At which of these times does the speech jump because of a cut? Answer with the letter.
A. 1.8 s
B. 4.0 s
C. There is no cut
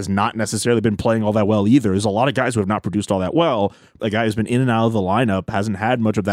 B